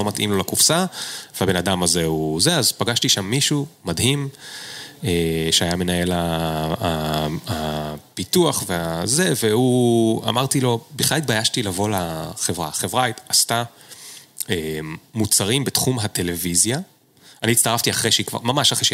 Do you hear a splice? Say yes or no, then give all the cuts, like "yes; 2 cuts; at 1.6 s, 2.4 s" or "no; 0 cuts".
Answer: no; 0 cuts